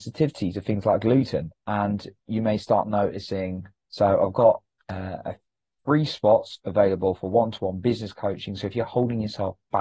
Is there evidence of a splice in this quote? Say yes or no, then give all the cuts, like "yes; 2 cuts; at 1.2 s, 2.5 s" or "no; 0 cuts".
yes; 1 cut; at 3.8 s